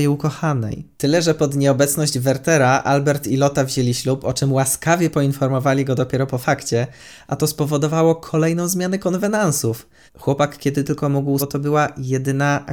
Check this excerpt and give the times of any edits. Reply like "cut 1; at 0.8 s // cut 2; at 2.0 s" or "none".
cut 1; at 10.1 s // cut 2; at 11.4 s